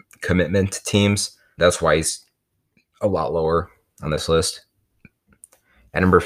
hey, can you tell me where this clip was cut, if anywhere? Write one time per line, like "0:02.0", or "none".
0:01.6

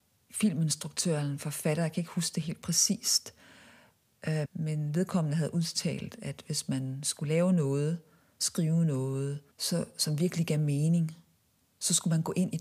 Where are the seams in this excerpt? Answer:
0:04.5
0:09.5

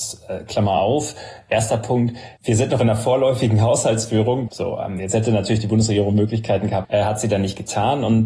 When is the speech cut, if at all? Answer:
0:04.5
0:06.8

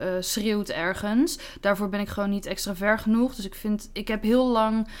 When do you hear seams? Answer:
none

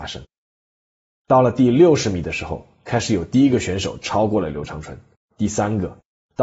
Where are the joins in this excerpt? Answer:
0:05.2

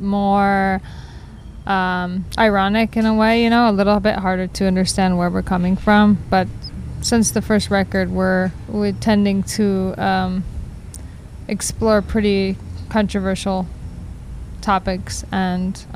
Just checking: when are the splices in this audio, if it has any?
none

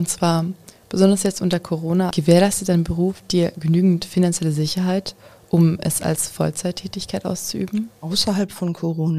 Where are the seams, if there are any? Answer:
0:02.1

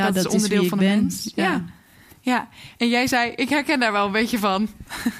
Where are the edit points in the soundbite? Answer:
none

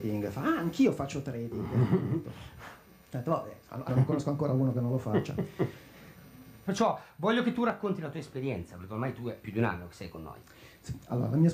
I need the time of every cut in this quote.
0:03.9
0:06.7

